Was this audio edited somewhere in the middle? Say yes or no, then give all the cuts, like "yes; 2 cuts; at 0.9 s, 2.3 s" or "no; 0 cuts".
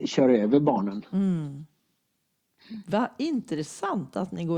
no; 0 cuts